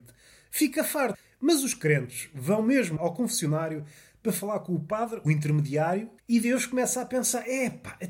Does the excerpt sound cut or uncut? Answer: cut